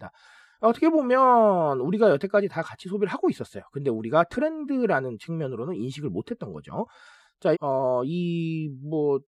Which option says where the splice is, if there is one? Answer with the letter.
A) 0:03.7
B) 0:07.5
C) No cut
B